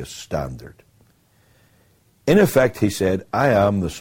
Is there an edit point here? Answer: no; 0 cuts

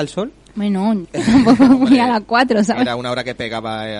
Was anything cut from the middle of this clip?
yes; 1 cut; at 1.0 s

